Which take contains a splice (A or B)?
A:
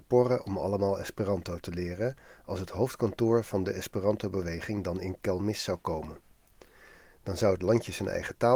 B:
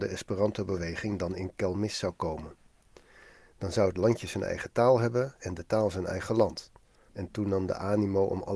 B